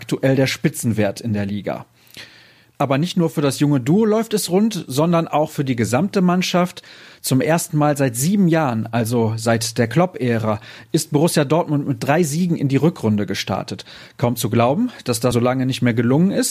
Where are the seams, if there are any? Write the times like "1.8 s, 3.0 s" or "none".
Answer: 15.3 s